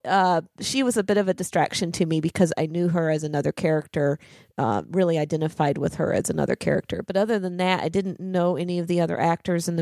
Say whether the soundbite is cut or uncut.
uncut